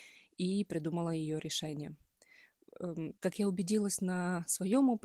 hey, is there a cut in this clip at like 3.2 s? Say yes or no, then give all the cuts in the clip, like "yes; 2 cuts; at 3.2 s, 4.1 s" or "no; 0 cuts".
yes; 1 cut; at 3.2 s